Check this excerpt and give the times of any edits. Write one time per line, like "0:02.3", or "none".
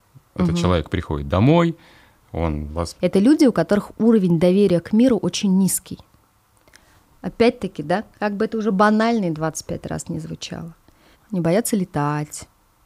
0:03.0
0:11.1